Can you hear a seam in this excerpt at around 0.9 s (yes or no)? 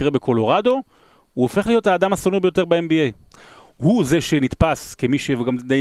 no